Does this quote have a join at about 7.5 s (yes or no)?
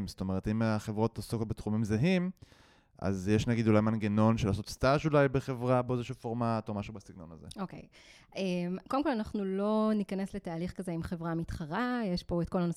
no